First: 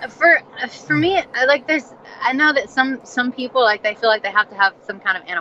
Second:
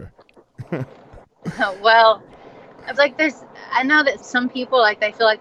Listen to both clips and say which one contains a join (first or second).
second